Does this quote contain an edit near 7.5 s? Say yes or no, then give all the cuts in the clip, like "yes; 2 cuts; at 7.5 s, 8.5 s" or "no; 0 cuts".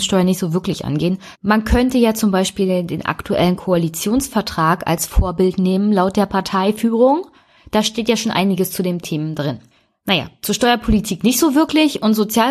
no; 1 cut; at 1.3 s